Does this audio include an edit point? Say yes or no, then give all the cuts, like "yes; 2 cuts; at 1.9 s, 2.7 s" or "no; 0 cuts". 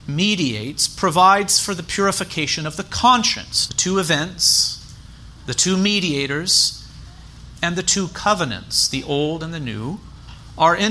yes; 1 cut; at 3.7 s